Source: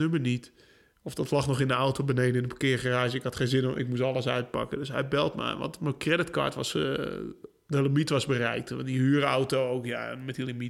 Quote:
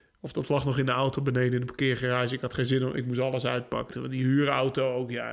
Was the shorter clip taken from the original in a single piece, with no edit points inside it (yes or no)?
no